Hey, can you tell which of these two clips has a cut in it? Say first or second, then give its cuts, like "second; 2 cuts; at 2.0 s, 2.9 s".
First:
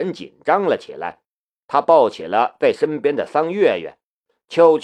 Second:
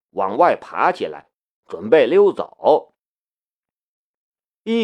first; 1 cut; at 1.6 s